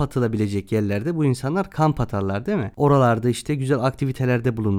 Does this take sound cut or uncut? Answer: uncut